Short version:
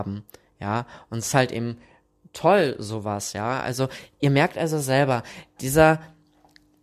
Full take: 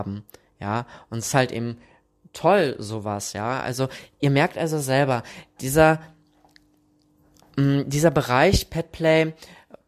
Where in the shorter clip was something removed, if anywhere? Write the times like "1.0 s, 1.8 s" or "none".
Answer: none